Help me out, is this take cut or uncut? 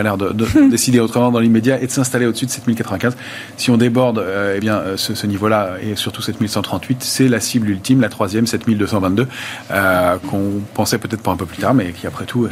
uncut